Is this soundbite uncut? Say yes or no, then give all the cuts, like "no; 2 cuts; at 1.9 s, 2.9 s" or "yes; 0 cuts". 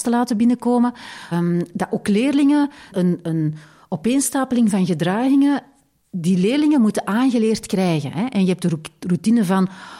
no; 2 cuts; at 1.3 s, 2.9 s